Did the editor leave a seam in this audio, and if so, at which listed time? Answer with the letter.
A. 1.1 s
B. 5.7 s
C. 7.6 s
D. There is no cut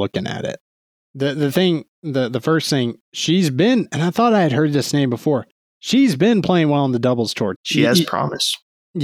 C